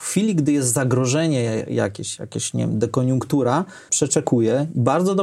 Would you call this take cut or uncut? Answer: cut